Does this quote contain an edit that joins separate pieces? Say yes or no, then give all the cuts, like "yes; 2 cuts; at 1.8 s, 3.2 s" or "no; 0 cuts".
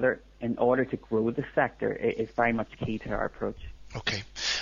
no; 0 cuts